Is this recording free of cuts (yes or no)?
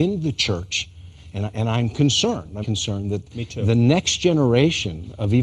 no